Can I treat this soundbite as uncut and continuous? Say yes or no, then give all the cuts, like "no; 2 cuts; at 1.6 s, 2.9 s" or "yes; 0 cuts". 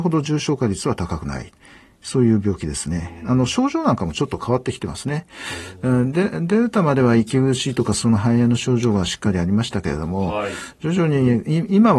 yes; 0 cuts